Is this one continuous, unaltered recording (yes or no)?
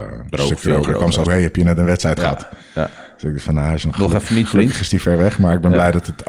no